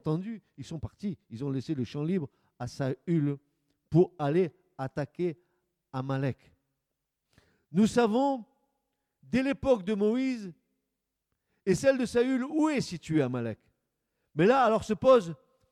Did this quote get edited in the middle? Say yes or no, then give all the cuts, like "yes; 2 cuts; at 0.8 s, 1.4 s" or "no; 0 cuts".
no; 0 cuts